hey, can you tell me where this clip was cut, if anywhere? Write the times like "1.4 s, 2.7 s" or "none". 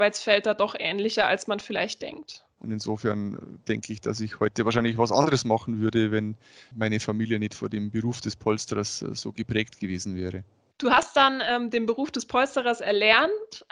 2.6 s